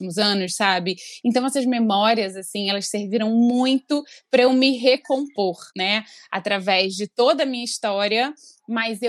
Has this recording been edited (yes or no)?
yes